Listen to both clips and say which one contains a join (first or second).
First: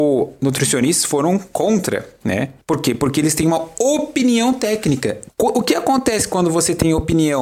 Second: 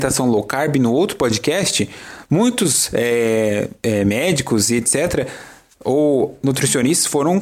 first